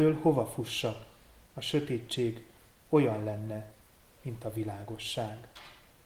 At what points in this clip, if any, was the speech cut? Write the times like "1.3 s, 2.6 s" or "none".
1.5 s